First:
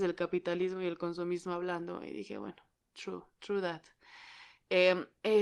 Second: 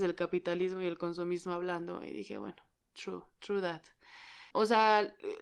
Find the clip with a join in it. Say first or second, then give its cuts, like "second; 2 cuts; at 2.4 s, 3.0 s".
second; 1 cut; at 4.5 s